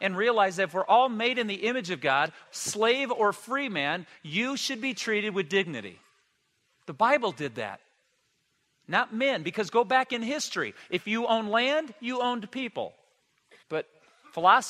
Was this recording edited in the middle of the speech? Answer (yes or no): yes